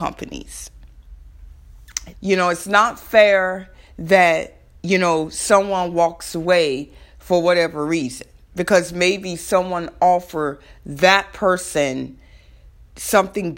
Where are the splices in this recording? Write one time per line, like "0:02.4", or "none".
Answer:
0:02.1